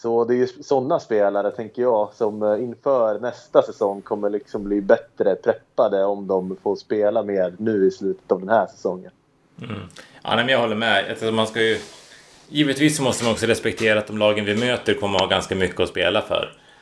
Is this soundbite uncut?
yes; 0 cuts

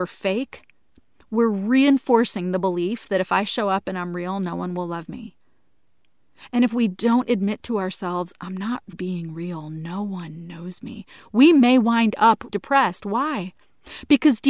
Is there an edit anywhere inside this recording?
yes; 2 cuts; at 8.9 s, 12.5 s

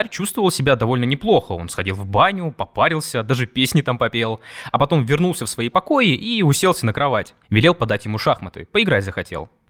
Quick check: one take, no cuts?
no; 1 cut; at 7.4 s

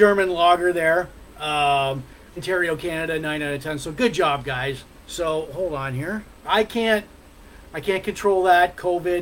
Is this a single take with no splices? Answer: no; 3 cuts; at 2.4 s, 5.0 s, 6.4 s

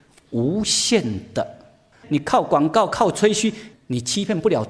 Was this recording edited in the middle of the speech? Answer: yes; 2 cuts; at 1.9 s, 3.7 s

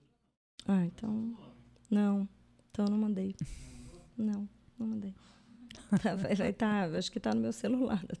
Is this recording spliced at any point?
no; 0 cuts

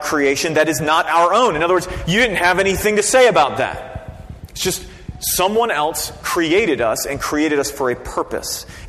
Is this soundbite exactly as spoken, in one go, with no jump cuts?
yes; 0 cuts

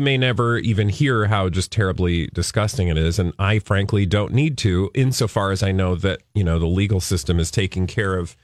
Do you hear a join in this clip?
no; 0 cuts

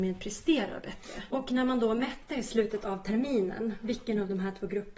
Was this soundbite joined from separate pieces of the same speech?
yes; 1 cut; at 1.3 s

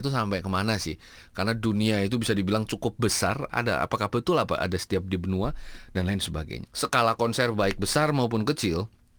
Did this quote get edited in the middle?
yes; 2 cuts; at 3.5 s, 6.7 s

